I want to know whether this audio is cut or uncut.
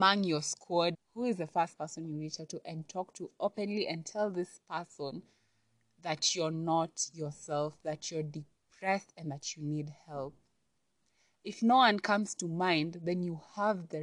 cut